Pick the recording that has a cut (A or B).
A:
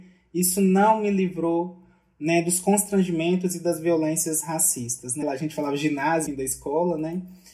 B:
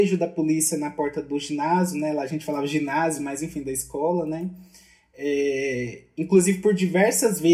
A